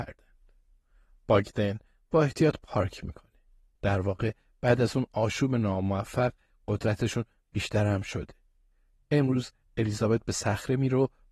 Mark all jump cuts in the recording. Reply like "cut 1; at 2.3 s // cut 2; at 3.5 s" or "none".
cut 1; at 3.8 s